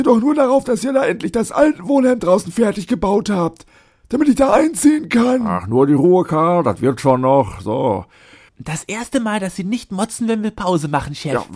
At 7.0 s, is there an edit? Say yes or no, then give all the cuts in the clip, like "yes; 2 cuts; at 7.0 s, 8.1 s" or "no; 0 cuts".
no; 1 cut; at 8.5 s